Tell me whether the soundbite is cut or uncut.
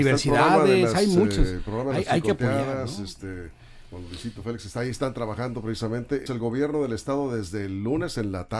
cut